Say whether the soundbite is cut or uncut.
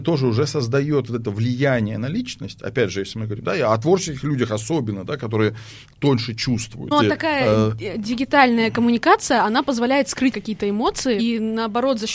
cut